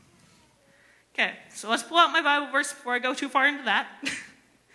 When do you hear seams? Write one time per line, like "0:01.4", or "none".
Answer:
none